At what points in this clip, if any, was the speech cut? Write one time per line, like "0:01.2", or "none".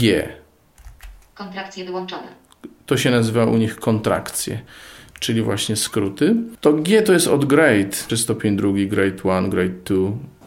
0:08.1